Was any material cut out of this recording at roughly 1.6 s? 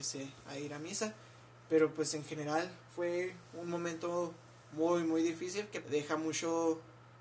no; 2 cuts; at 4.6 s, 5.8 s

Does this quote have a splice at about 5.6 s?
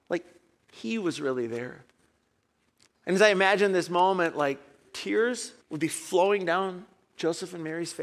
yes; 2 cuts; at 2.9 s, 5.6 s

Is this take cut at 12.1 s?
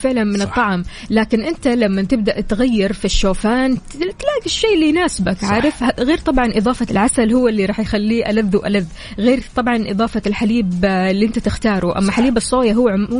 no; 1 cut; at 6.9 s

